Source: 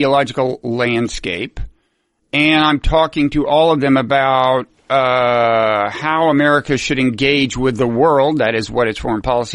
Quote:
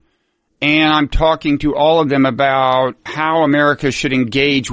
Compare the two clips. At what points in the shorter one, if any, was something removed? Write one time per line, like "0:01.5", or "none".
0:03.1

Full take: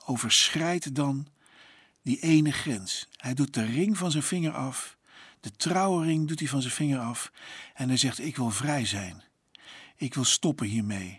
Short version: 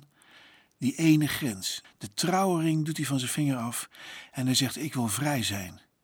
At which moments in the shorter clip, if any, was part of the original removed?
0:01.8

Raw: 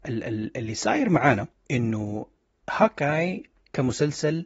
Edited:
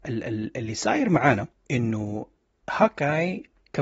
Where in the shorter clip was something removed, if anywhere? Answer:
none

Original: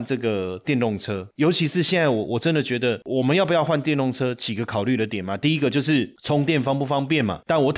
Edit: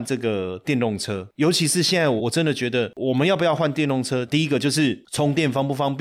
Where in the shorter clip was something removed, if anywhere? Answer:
0:02.2
0:04.3

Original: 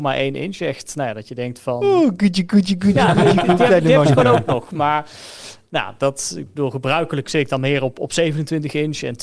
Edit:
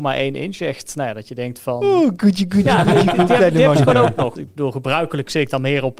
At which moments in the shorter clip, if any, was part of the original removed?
0:02.2
0:04.4

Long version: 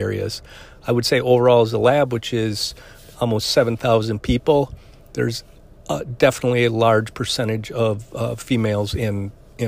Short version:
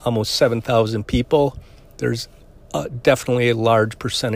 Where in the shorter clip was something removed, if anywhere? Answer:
none

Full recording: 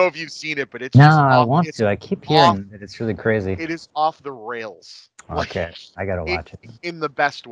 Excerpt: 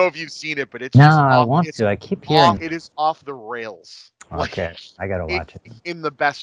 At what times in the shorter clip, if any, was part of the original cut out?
0:02.6

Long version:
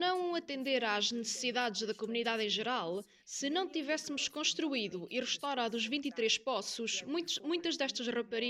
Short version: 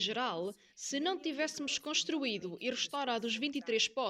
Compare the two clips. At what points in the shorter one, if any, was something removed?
none

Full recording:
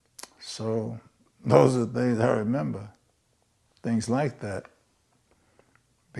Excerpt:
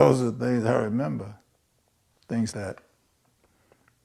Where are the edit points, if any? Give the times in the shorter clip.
0:02.5

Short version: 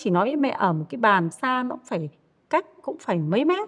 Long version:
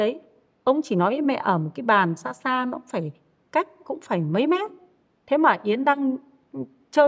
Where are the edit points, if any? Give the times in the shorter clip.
0:01.3

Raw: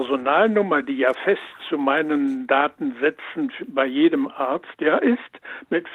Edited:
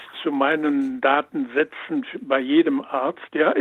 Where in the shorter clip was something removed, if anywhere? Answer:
none

